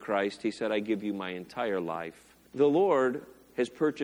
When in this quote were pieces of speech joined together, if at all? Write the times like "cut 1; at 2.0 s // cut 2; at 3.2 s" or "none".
cut 1; at 2.5 s